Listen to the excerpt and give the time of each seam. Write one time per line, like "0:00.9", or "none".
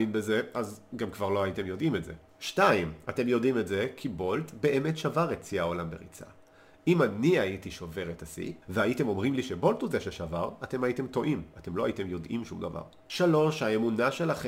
0:08.6